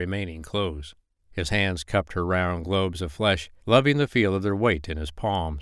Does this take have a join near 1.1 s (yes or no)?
yes